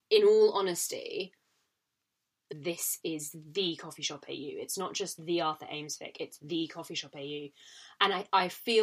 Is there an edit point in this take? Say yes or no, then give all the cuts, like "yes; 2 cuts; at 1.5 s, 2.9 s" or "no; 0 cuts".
yes; 1 cut; at 2.5 s